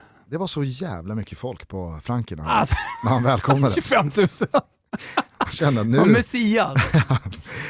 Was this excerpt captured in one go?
yes; 0 cuts

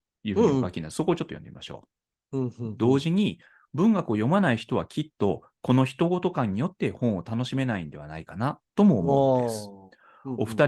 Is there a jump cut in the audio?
yes; 1 cut; at 2.2 s

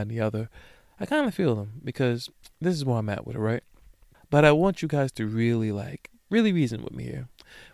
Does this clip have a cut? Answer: yes; 2 cuts; at 4.1 s, 6.2 s

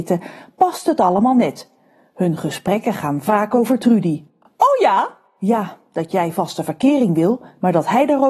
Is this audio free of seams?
yes; 0 cuts

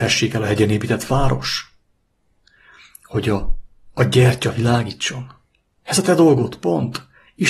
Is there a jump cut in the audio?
no; 0 cuts

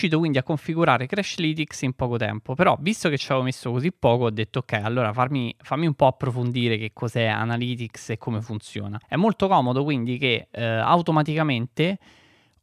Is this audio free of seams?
no; 1 cut; at 9.0 s

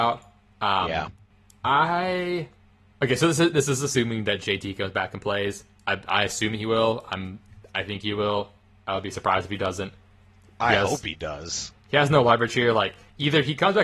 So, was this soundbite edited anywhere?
no; 0 cuts

